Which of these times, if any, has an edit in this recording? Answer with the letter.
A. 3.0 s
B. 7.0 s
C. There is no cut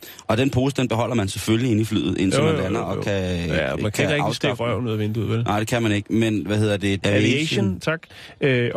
B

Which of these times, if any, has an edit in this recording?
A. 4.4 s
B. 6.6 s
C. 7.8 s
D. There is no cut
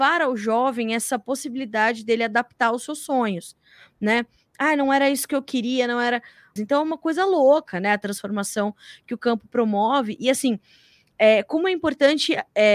B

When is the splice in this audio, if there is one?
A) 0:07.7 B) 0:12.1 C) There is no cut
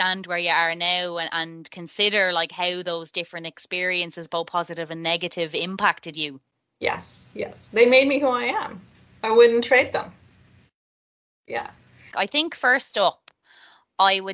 B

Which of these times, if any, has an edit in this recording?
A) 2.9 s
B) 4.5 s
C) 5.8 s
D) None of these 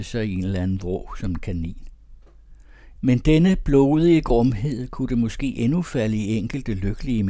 A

